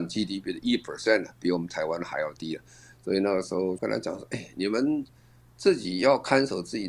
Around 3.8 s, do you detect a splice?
yes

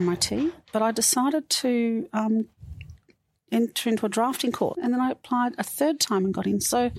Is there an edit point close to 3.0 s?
no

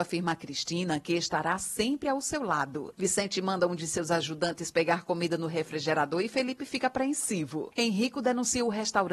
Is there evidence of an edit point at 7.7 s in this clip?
no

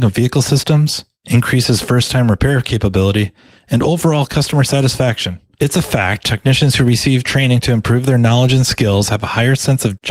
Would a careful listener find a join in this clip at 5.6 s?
yes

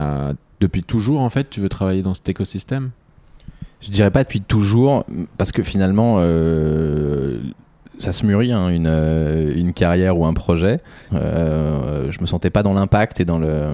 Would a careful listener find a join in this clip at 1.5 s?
no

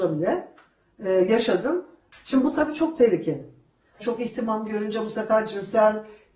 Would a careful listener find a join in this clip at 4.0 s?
yes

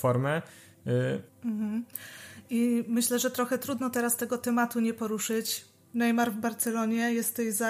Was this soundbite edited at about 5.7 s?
no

